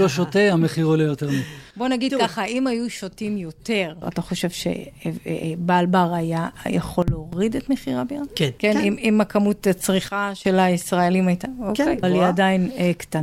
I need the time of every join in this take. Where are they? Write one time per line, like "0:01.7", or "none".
0:04.0
0:12.0